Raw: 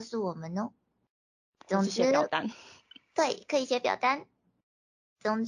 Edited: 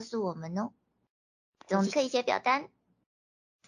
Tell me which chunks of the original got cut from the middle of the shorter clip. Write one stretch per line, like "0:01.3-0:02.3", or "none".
0:01.9-0:03.5